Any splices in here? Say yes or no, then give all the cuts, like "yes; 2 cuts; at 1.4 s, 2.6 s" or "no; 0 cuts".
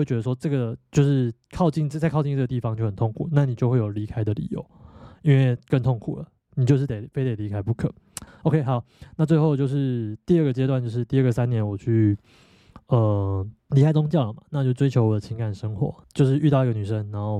yes; 3 cuts; at 8.3 s, 13.6 s, 16.0 s